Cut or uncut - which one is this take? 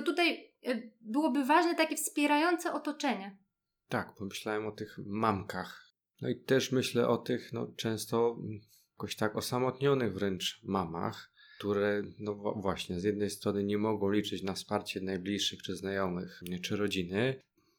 cut